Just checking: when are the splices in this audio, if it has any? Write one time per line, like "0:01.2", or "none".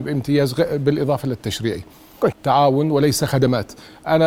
0:02.3